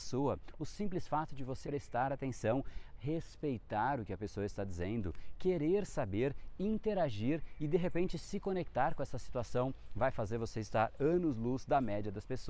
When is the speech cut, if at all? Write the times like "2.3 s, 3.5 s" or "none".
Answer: 1.6 s

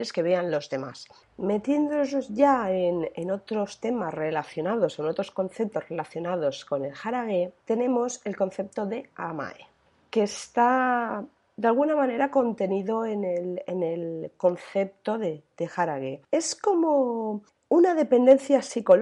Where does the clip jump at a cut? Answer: none

